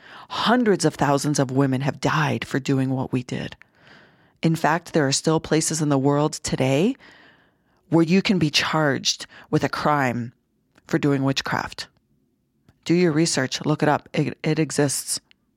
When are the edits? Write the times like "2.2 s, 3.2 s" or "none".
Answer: none

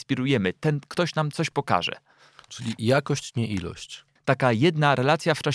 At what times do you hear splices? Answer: 4.2 s

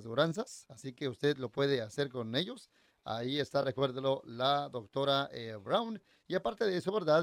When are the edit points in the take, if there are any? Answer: none

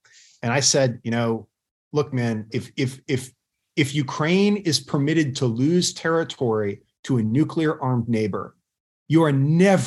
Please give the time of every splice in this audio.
2.5 s

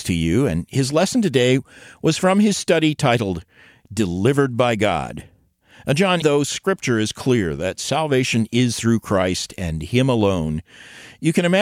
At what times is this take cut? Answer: 6.2 s

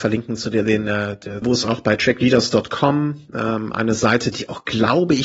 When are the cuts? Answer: 1.4 s

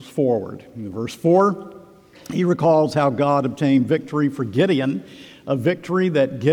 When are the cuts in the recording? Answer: none

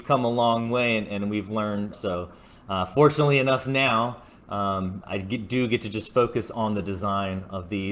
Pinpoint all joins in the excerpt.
1.9 s, 5.0 s

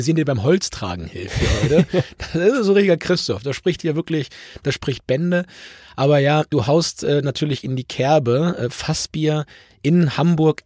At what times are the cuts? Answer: none

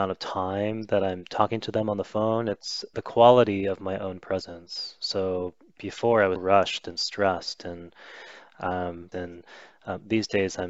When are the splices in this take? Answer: 2.9 s, 6.4 s, 9.1 s

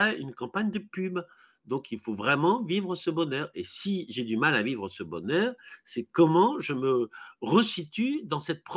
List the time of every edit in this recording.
none

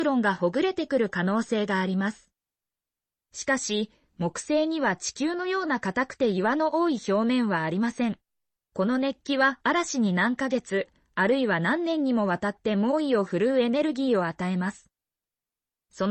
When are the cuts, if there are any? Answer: 8.6 s

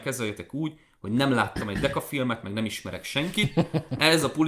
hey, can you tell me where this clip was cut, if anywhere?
none

